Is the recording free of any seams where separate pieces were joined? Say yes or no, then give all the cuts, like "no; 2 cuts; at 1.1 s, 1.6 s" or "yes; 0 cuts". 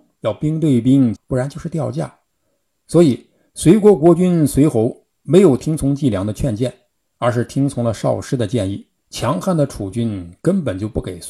no; 2 cuts; at 1.2 s, 9.0 s